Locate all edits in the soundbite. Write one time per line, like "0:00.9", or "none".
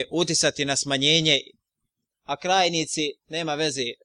0:02.1